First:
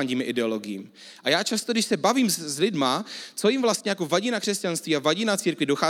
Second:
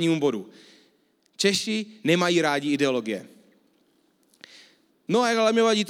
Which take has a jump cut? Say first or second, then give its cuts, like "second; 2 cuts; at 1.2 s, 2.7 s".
second; 1 cut; at 4.9 s